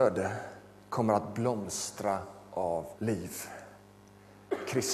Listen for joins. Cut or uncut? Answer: cut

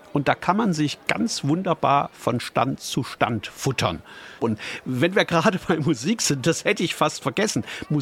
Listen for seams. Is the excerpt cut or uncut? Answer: cut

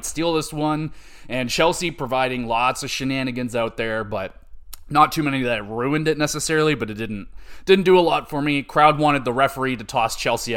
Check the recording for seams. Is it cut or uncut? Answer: uncut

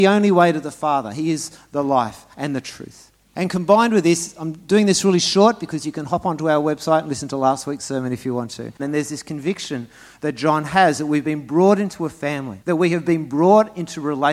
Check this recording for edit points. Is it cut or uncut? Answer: cut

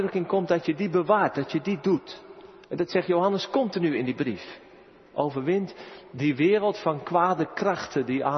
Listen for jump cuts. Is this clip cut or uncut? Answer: cut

